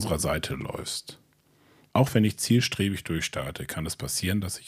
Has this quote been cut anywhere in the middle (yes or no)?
yes